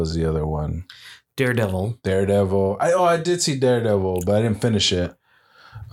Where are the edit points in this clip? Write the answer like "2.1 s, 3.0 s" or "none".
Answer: none